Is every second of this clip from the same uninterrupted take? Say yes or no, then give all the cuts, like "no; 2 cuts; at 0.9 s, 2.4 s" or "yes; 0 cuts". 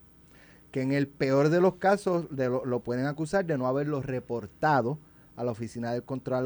yes; 0 cuts